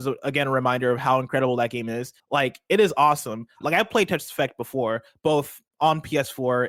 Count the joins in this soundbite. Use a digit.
2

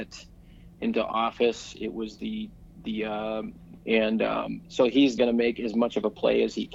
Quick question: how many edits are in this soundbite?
2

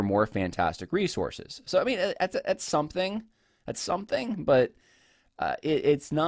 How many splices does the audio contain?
0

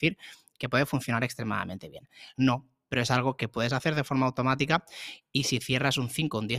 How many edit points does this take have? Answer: 1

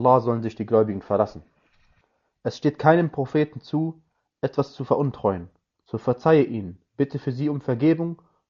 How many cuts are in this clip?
2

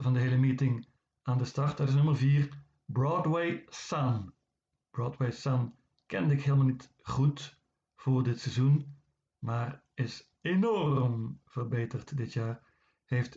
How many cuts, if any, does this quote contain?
1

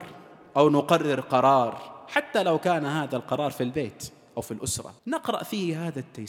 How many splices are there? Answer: 1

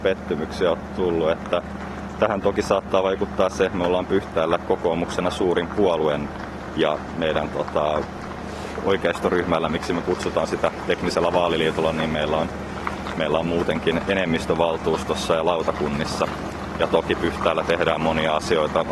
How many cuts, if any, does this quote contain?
0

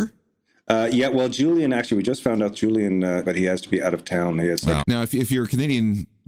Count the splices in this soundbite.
2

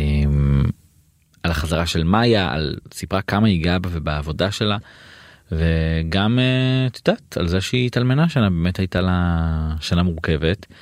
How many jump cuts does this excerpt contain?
0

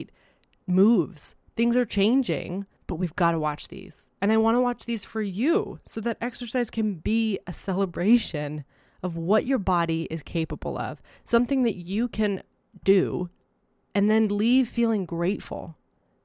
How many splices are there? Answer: 2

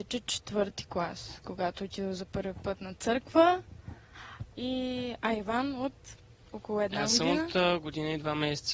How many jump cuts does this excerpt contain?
1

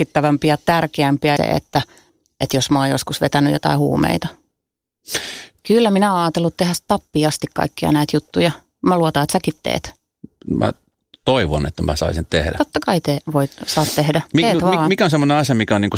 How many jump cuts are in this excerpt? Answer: 2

